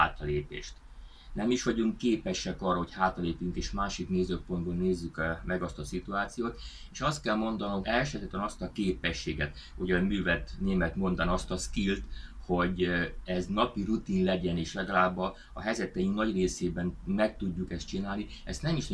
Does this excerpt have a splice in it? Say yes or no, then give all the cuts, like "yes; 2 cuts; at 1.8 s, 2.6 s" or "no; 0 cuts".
yes; 1 cut; at 7.8 s